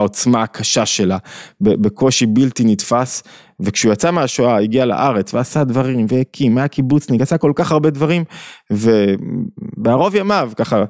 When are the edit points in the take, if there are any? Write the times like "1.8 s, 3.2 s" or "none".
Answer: none

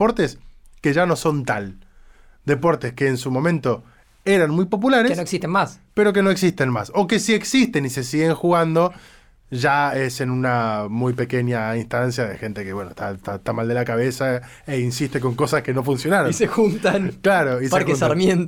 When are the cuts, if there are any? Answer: none

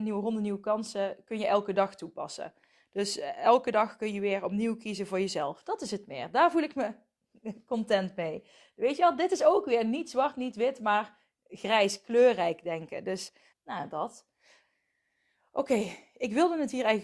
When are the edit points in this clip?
13.5 s

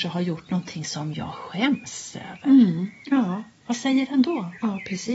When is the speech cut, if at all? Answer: none

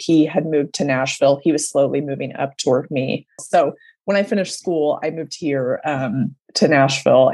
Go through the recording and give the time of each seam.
3.4 s

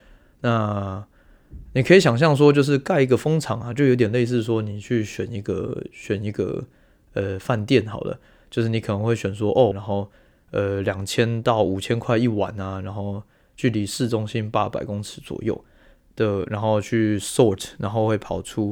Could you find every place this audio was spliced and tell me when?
9.7 s

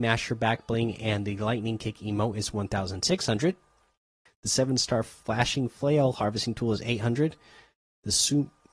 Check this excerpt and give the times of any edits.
4.3 s

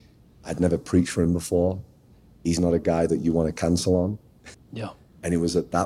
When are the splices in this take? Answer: 4.5 s

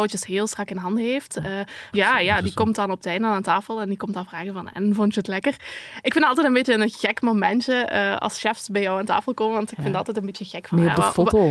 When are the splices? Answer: 1.9 s

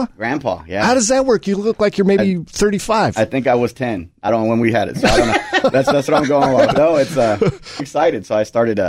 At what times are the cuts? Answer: 6.8 s, 7.8 s

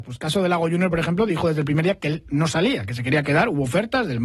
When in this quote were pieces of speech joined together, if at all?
none

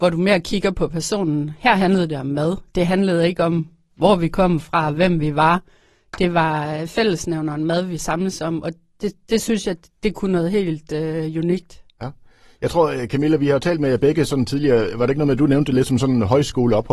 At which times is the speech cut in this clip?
none

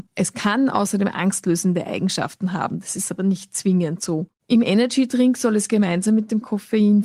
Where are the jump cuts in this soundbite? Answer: none

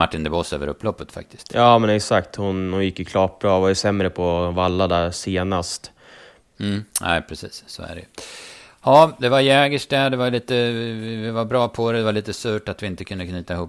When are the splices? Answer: 6.4 s

